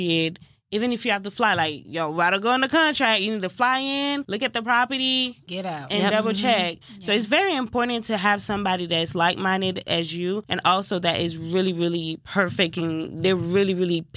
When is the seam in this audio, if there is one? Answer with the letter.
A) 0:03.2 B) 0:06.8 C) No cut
B